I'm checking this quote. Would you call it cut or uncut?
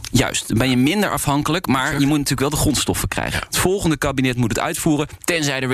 cut